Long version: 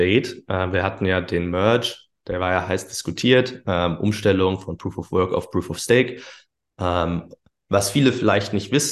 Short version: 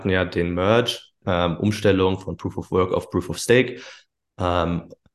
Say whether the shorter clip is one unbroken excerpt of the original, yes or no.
no